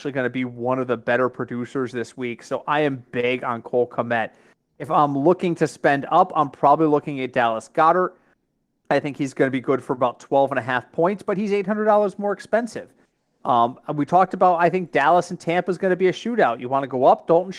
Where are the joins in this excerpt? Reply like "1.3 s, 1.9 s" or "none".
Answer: none